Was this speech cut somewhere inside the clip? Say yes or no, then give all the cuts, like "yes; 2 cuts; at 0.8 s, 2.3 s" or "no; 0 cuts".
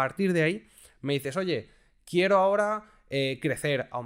no; 0 cuts